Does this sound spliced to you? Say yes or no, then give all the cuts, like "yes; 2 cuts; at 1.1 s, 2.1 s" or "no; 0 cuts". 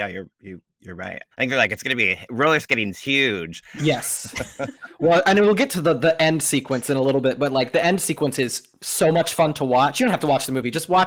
yes; 2 cuts; at 1.3 s, 3.8 s